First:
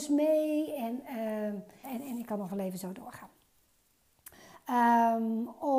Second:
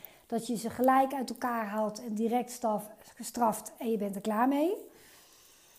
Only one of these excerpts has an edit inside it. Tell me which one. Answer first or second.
first